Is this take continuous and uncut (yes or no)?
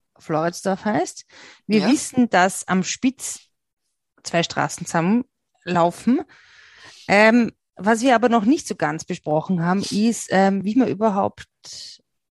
yes